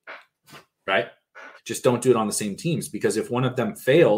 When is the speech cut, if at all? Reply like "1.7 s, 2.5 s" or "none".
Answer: 1.6 s